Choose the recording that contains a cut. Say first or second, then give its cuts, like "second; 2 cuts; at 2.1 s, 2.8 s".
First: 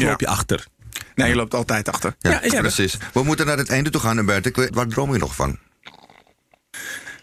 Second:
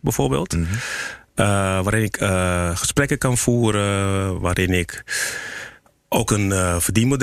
first; 2 cuts; at 2.5 s, 4.7 s